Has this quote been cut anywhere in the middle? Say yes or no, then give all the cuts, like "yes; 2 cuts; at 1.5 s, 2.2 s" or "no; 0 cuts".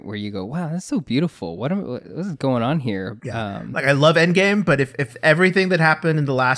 no; 0 cuts